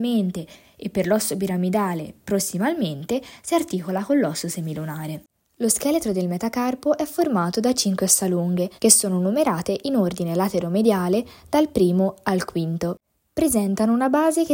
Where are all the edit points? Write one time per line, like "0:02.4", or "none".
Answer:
0:08.8